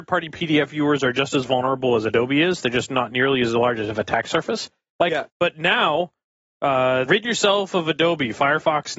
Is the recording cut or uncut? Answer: cut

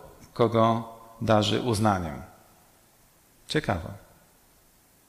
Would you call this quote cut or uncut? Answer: uncut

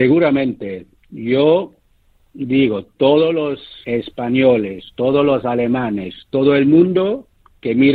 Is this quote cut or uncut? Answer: cut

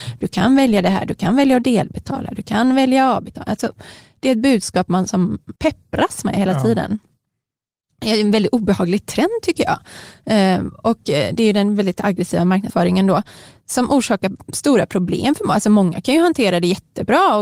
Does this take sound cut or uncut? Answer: cut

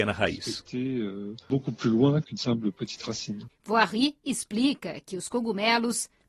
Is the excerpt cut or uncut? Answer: cut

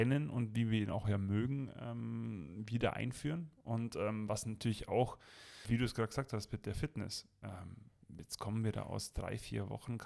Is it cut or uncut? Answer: cut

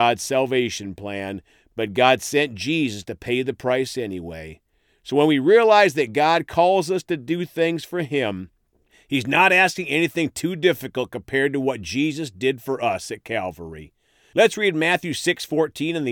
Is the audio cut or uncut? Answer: uncut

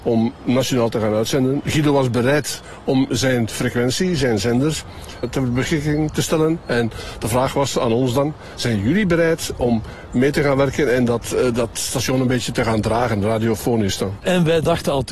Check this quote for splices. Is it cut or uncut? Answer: cut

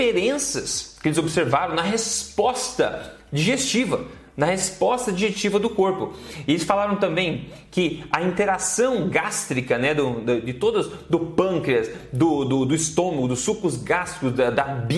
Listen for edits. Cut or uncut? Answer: uncut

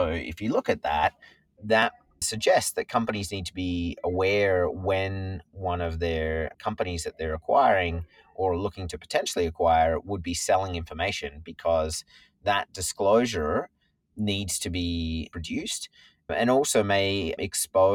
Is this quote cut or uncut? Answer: uncut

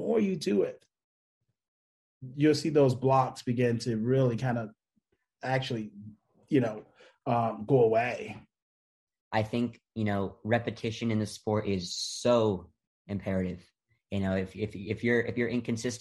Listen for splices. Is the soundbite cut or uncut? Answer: uncut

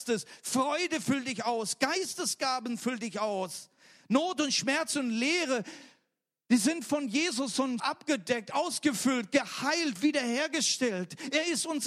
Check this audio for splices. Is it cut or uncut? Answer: cut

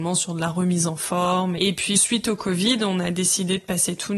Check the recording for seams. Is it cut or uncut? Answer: uncut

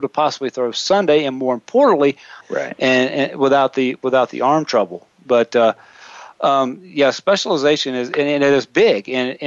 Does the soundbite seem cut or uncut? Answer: cut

